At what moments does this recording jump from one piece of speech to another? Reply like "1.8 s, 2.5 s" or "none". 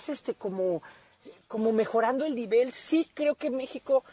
none